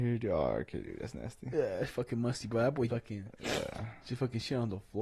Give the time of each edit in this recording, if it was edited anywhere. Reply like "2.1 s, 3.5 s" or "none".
2.9 s